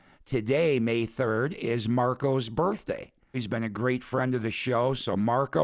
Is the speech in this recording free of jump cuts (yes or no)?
no